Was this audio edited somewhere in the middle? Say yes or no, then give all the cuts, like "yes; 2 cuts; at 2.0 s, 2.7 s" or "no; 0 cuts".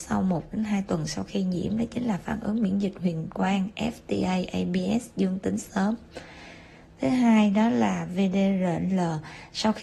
no; 0 cuts